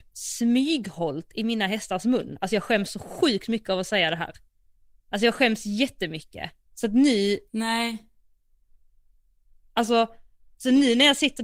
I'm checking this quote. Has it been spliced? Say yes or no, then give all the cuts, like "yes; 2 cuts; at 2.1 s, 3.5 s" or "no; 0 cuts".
yes; 1 cut; at 6.7 s